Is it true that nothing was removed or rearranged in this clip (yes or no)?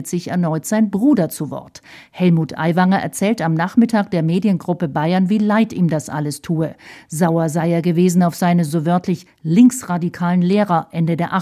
yes